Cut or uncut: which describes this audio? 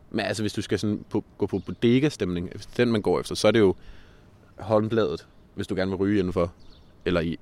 cut